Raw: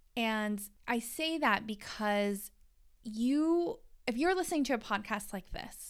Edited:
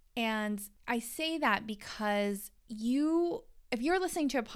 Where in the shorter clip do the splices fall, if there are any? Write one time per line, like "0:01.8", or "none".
0:02.6